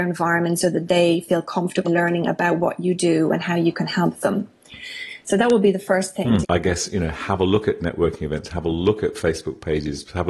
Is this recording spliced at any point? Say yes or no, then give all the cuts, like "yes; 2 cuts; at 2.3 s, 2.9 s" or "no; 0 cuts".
yes; 3 cuts; at 1.8 s, 6.4 s, 8.5 s